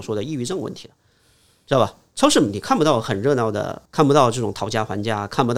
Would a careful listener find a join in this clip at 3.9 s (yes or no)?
yes